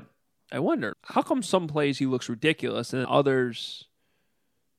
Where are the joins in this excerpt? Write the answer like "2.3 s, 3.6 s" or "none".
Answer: 0.9 s, 3.0 s